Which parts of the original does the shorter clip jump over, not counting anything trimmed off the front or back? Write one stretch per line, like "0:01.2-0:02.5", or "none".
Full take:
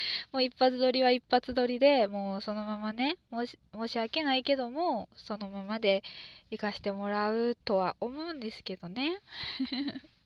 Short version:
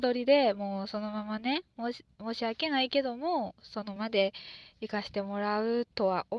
0:05.5-0:05.7